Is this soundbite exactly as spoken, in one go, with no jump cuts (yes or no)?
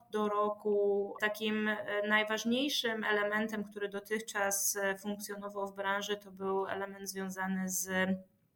no